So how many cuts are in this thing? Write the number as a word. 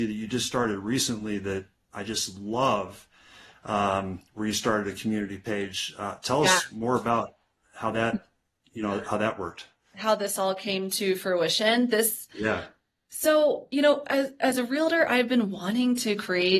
zero